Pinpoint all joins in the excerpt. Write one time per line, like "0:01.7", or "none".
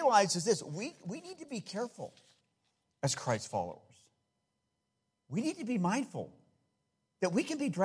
none